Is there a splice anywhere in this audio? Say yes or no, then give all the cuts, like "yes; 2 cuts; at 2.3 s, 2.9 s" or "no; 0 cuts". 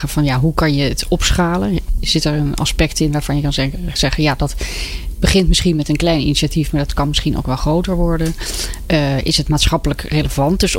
no; 0 cuts